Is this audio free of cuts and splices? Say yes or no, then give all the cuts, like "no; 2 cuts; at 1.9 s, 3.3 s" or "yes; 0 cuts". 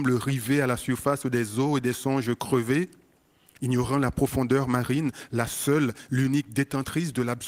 yes; 0 cuts